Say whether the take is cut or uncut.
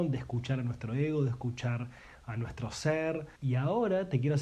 cut